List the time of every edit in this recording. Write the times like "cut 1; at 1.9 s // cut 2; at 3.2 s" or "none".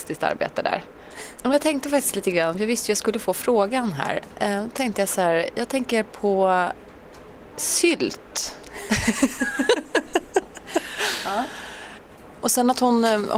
cut 1; at 1.4 s